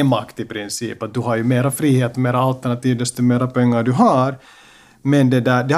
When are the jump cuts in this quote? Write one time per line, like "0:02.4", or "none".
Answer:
none